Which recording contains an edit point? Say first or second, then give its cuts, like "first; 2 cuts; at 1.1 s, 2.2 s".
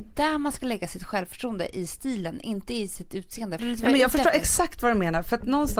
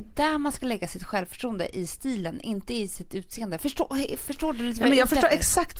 first; 1 cut; at 3.6 s